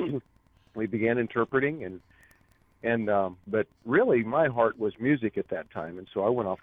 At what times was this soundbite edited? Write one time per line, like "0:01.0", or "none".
0:03.5